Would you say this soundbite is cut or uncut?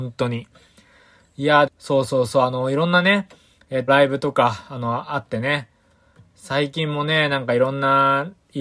cut